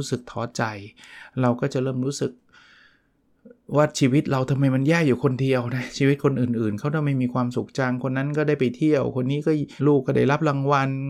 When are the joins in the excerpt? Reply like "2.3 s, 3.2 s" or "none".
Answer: 9.8 s